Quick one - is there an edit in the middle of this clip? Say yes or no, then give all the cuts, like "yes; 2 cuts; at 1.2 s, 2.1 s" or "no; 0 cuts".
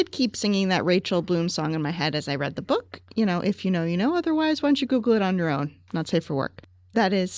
no; 0 cuts